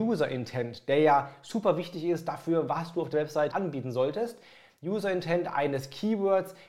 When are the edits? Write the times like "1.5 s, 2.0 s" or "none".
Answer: 3.5 s